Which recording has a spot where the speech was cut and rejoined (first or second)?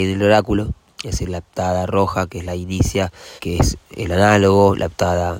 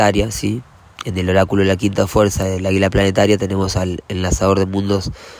first